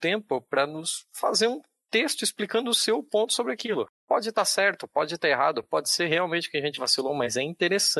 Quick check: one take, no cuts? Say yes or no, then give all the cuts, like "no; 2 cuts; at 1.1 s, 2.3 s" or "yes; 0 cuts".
yes; 0 cuts